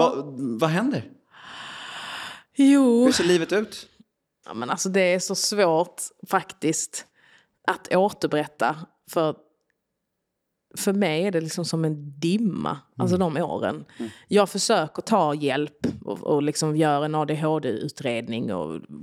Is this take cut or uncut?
cut